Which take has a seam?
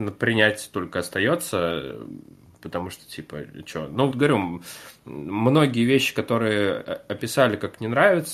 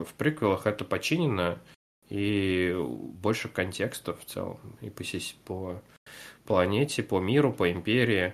first; 1 cut; at 4.1 s

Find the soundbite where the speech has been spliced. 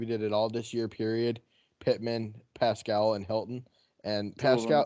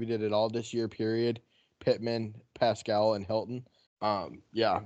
second; 1 cut; at 3.9 s

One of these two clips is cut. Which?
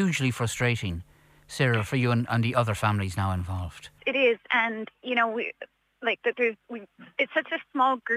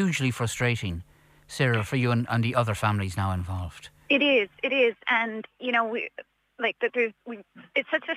first; 1 cut; at 4.0 s

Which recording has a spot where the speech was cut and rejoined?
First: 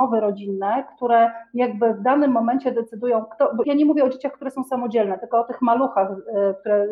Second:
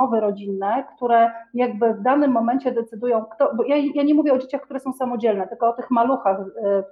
first; 1 cut; at 3.6 s

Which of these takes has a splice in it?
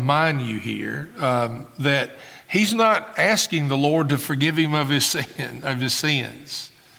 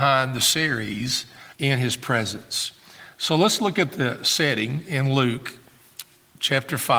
second; 1 cut; at 1.5 s

